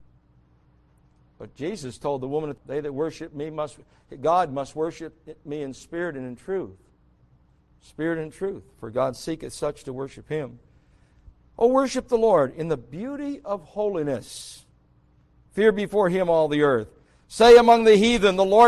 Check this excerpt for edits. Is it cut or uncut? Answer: cut